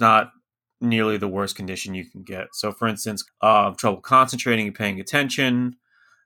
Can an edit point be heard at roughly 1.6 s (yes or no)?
no